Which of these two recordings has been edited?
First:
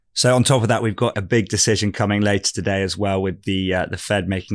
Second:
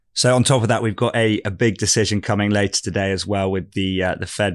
first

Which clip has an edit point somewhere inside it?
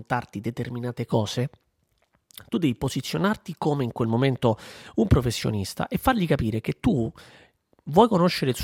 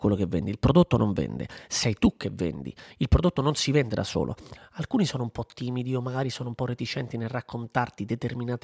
second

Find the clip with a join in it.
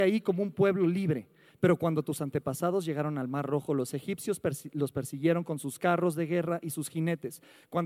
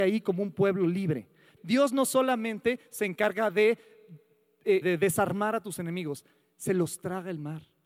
second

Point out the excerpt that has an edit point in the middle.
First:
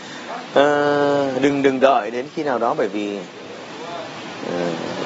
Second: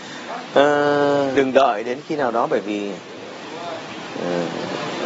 second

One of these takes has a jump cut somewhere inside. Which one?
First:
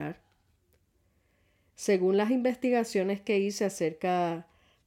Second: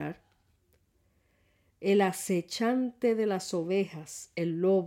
first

